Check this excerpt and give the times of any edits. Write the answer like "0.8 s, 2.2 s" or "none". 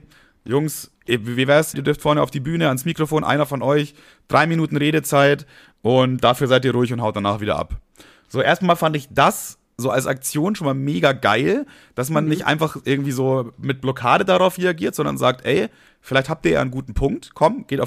1.7 s